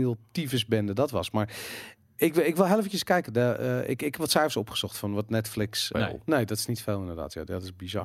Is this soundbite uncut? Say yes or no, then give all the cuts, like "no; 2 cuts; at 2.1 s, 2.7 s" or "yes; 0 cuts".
no; 1 cut; at 5.9 s